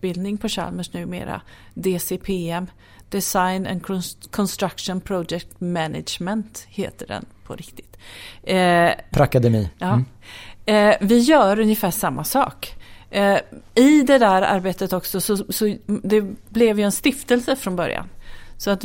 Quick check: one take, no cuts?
no; 1 cut; at 9.1 s

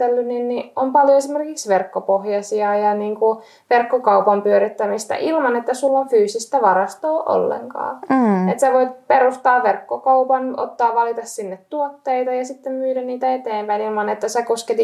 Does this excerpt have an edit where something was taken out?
no; 0 cuts

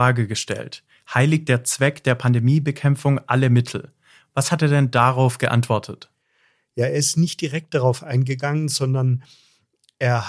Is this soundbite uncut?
yes; 0 cuts

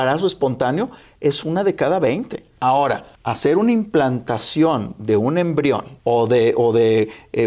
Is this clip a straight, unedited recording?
yes; 0 cuts

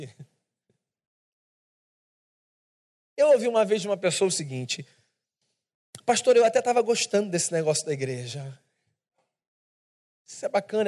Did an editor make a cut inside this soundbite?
no; 0 cuts

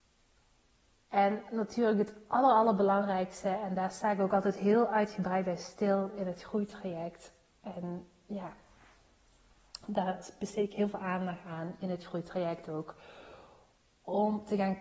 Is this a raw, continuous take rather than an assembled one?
yes; 0 cuts

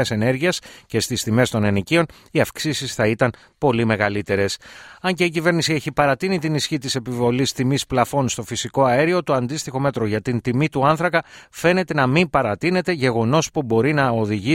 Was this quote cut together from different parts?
no; 0 cuts

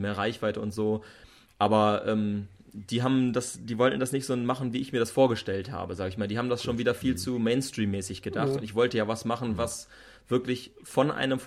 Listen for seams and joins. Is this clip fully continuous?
yes; 0 cuts

